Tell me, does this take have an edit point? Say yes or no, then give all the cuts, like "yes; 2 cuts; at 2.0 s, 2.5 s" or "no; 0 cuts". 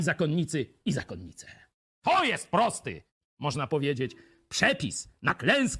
no; 0 cuts